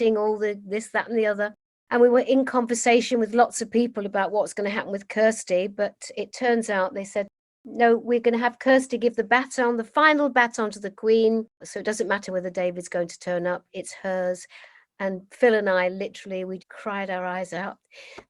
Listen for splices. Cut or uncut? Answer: cut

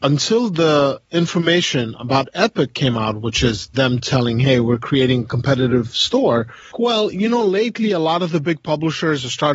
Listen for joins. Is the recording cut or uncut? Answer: cut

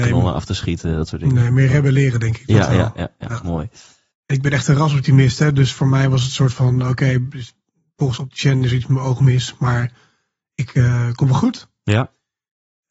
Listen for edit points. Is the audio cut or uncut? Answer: cut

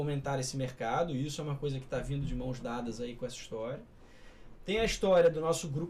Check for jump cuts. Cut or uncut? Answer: uncut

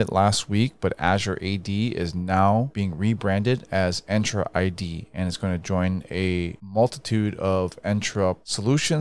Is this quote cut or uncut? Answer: uncut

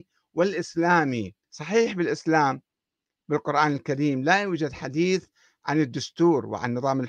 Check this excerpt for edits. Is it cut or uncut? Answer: cut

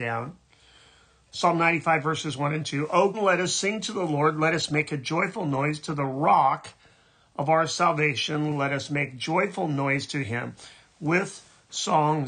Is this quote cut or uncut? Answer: cut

